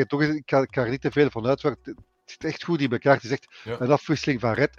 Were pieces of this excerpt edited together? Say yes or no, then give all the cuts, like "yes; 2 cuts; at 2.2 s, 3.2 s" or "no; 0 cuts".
no; 0 cuts